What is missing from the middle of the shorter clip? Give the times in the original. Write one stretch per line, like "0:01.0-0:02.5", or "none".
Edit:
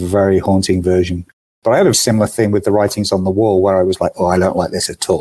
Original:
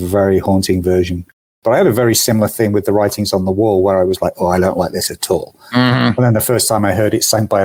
0:01.9-0:02.1

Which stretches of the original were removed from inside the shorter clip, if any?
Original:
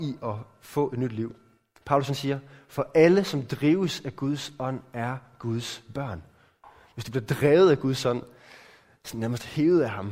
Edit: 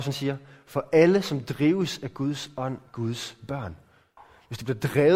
0:04.9-0:05.3

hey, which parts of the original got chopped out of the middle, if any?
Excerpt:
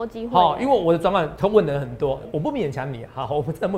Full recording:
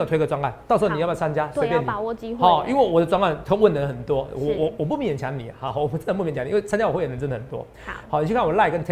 0:04.3-0:04.7

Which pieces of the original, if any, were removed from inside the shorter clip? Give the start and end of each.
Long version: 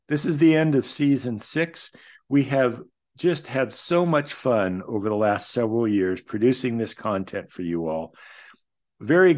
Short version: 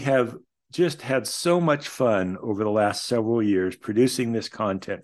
none

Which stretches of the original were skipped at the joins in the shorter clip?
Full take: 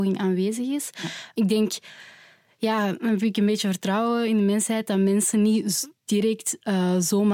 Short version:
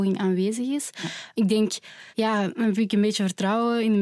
0:02.1-0:02.5

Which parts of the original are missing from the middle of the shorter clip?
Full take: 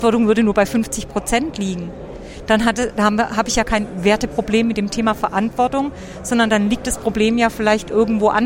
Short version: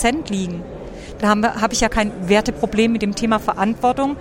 0:02.5-0:02.9

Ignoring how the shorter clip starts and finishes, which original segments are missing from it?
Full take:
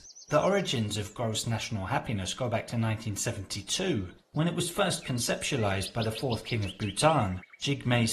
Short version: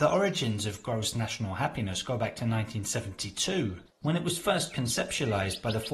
none

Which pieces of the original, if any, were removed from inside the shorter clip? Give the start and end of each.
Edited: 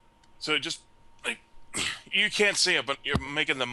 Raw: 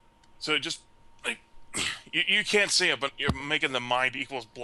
0:02.1-0:02.2

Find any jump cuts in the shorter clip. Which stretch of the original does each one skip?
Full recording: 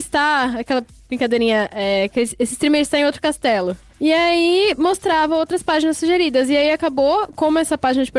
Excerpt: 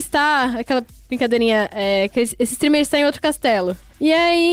none

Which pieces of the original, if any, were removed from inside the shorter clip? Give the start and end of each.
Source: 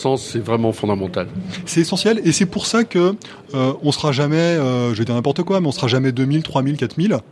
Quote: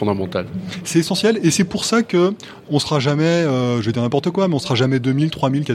0:03.5-0:03.8

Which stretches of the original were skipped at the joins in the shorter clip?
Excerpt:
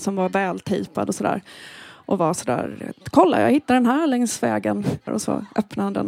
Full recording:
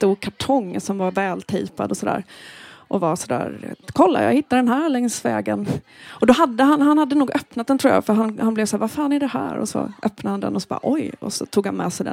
0:05.9-0:09.5

